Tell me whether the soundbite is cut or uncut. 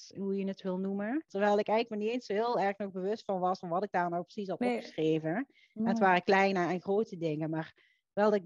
cut